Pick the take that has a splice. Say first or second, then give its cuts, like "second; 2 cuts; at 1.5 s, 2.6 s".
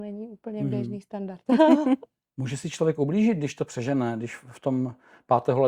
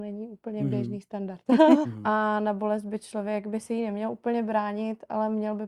second; 1 cut; at 1.8 s